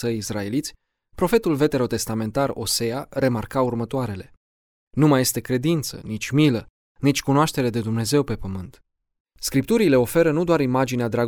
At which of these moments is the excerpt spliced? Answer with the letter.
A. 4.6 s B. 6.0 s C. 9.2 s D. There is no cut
C